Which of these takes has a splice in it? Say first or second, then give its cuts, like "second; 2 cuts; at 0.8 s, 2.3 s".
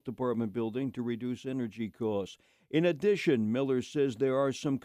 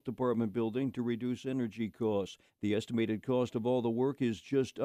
second; 1 cut; at 2.5 s